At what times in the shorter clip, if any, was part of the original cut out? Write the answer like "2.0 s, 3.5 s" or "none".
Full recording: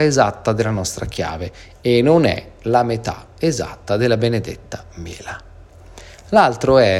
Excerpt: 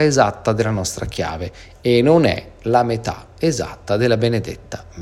none

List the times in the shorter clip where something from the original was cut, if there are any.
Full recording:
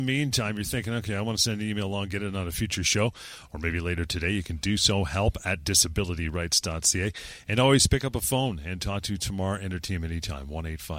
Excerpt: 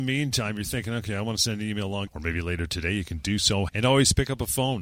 2.1 s, 3.7 s

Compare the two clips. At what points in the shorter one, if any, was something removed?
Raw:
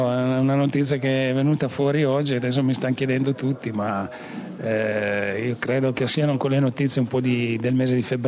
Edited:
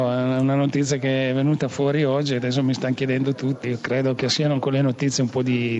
3.6 s

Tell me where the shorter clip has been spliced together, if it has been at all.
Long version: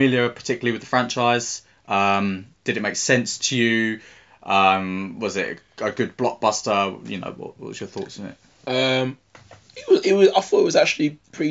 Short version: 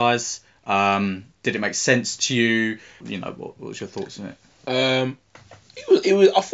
3.0 s

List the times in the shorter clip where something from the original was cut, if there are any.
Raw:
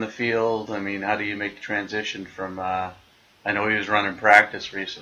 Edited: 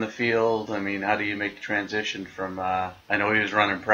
3.0 s

